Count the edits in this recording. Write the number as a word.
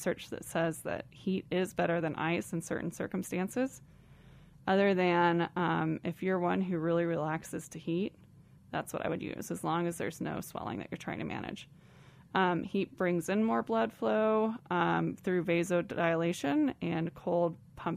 zero